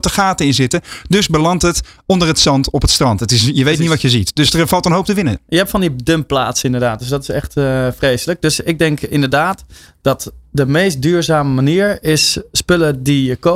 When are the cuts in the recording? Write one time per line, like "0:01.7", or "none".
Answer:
none